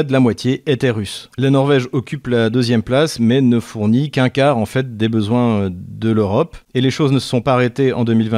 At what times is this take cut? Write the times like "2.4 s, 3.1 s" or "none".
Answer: none